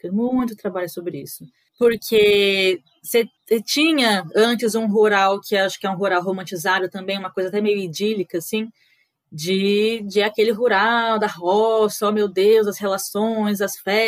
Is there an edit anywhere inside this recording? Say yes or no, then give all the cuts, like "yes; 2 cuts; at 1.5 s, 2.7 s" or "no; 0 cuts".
no; 0 cuts